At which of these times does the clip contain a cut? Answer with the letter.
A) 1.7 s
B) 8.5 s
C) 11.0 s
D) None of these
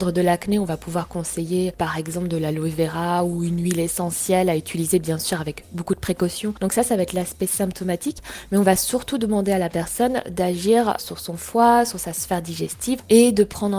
C